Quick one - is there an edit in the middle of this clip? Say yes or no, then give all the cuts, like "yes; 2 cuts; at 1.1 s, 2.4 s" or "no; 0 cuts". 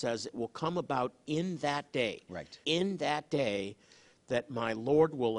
yes; 1 cut; at 2.6 s